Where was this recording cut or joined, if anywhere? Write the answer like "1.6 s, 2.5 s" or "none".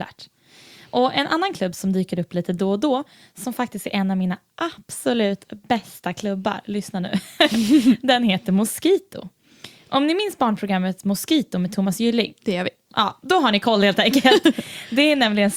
none